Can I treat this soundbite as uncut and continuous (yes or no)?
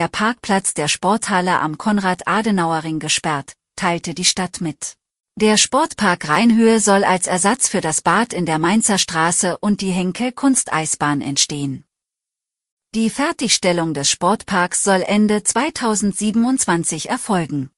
no